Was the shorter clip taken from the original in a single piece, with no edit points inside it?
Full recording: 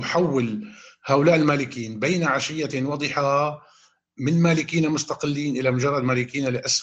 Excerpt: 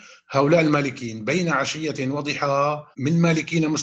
no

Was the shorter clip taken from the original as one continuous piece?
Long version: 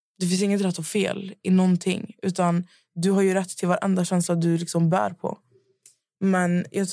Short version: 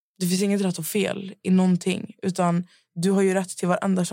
yes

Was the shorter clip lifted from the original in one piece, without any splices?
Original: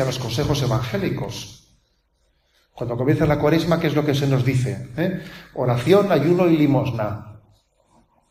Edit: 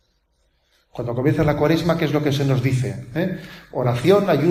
yes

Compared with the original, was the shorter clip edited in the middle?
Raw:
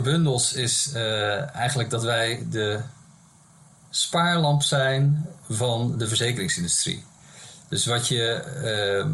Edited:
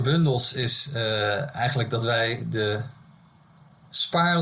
no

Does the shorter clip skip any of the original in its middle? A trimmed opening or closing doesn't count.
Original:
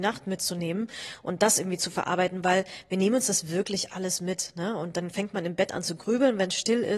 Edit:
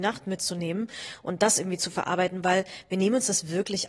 no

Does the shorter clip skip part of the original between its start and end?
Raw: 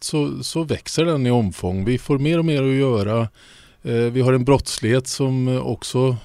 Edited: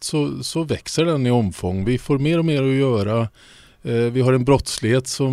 no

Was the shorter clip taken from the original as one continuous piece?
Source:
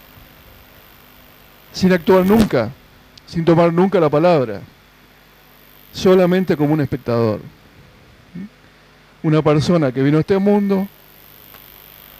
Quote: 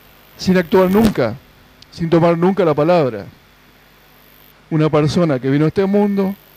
no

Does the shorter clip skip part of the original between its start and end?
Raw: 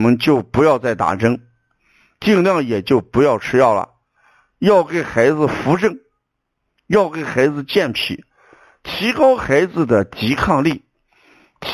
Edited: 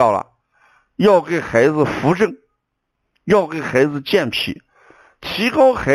no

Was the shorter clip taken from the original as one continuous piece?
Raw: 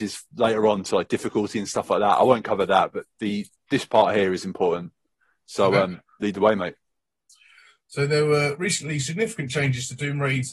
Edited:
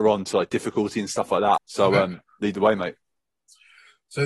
no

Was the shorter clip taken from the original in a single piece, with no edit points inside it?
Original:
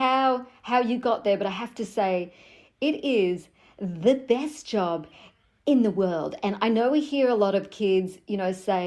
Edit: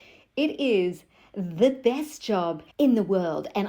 no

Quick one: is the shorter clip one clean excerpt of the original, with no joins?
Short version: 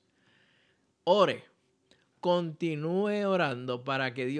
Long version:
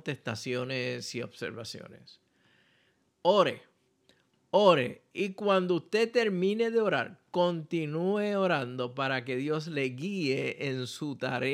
no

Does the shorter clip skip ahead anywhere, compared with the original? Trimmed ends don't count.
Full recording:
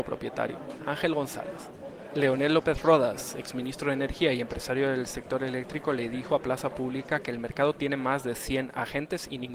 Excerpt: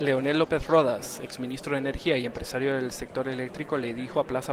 no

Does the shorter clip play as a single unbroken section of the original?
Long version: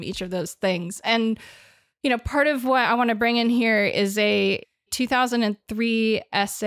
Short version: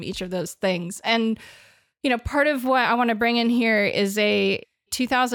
yes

